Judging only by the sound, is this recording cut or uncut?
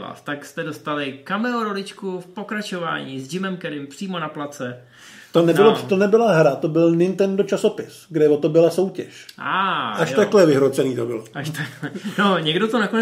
uncut